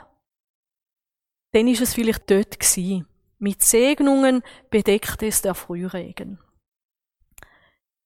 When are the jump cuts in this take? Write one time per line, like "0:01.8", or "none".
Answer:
0:02.2

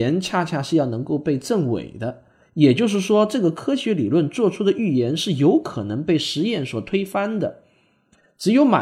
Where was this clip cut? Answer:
none

